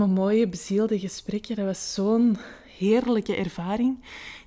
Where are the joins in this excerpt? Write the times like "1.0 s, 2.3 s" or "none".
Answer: none